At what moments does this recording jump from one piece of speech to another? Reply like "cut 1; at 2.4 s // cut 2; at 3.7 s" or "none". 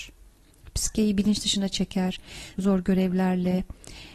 cut 1; at 2.5 s